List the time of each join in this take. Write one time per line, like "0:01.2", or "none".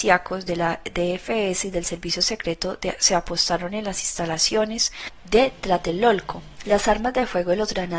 0:06.6